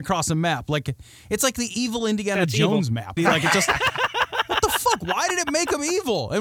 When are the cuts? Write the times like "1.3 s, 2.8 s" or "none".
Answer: 3.2 s